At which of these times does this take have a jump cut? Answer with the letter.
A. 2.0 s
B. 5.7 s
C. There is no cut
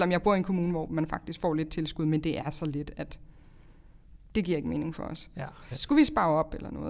B